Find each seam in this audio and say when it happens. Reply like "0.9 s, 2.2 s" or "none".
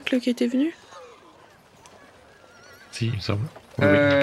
none